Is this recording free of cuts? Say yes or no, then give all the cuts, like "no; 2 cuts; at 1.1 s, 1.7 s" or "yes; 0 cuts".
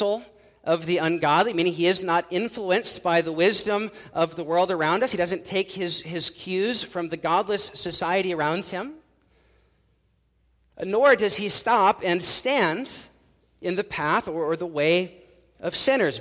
yes; 0 cuts